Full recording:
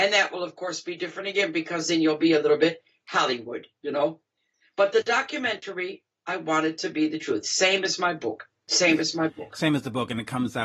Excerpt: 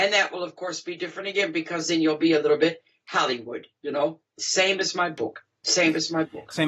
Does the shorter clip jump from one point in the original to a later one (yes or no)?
yes